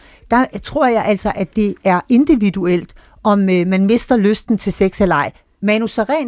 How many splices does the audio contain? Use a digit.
0